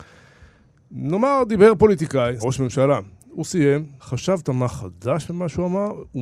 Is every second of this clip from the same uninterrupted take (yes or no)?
no